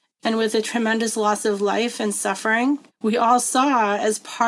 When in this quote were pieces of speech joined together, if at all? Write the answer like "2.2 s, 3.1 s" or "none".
2.9 s